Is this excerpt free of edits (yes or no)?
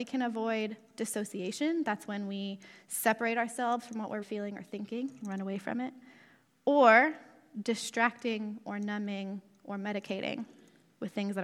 no